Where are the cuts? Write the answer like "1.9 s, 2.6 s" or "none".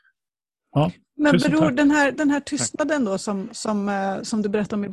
none